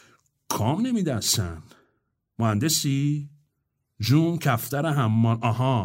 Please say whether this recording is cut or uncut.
uncut